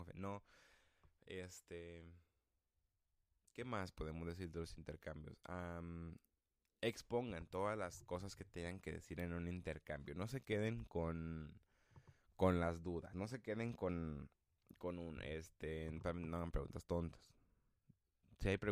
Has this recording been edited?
no; 0 cuts

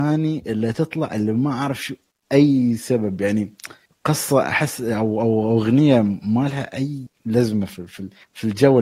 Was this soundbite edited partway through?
no; 0 cuts

